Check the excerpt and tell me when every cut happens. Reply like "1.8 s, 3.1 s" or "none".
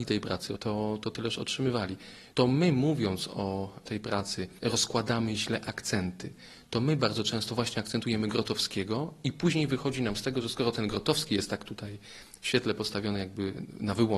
none